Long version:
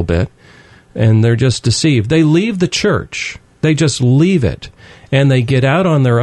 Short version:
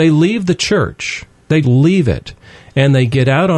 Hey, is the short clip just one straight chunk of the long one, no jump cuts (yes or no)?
no